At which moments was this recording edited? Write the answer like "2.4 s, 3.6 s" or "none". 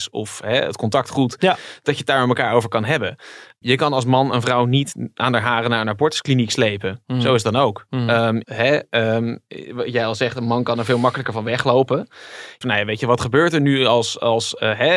8.4 s, 12.6 s